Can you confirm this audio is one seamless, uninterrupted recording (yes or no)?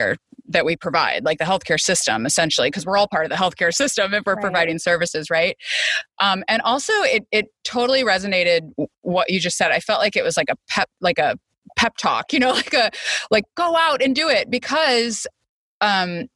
yes